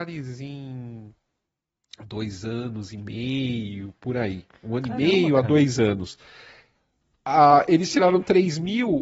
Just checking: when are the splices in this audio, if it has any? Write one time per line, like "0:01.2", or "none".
none

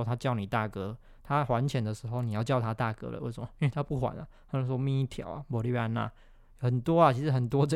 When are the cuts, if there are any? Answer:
none

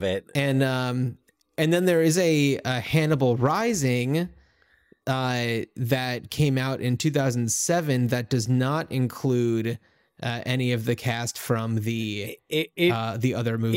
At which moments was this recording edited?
none

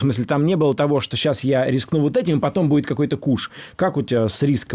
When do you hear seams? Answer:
none

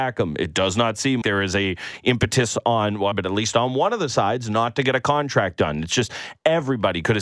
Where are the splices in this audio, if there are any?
0:01.2
0:03.1

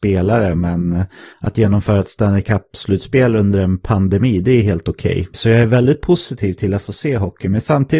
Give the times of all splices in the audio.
0:05.3

